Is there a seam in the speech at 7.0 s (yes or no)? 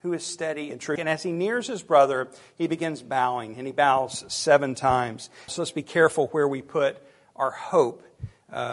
no